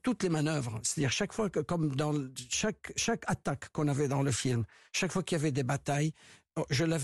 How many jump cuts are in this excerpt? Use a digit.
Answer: 0